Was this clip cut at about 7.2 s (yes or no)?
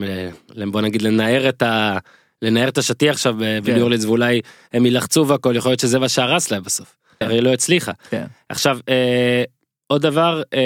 yes